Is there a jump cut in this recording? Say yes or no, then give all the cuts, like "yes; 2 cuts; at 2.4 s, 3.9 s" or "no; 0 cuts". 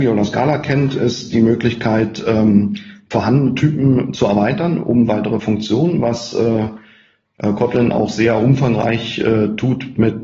no; 0 cuts